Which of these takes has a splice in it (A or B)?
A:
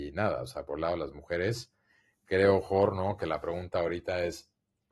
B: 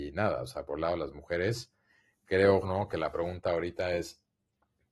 B